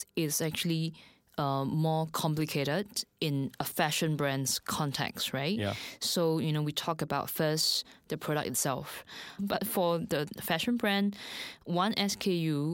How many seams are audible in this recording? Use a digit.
1